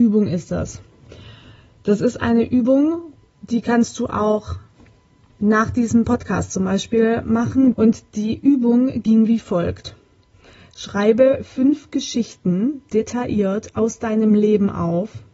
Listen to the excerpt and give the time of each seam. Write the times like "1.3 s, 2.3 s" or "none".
7.7 s